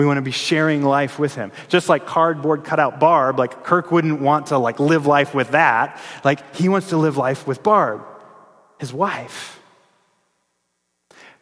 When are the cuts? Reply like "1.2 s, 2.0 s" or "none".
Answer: none